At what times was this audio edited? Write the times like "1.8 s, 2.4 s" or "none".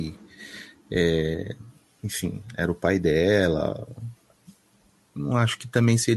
none